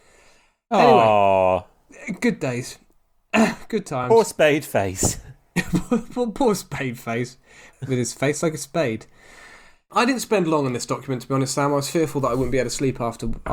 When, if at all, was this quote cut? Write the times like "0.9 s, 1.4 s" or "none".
none